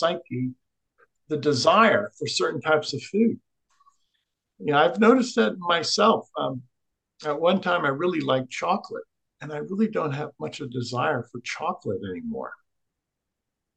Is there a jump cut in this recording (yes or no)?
no